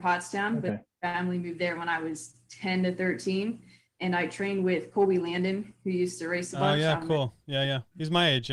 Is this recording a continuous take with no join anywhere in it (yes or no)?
yes